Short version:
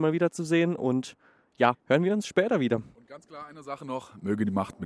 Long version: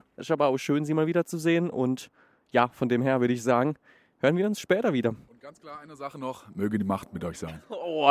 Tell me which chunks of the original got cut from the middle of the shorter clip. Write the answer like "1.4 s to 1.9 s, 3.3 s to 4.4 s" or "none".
2.7 s to 4.1 s